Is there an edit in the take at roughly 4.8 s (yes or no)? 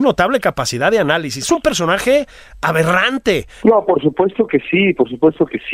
no